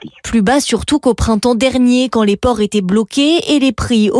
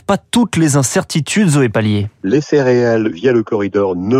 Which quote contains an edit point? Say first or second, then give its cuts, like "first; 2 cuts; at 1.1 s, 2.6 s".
second; 1 cut; at 2.2 s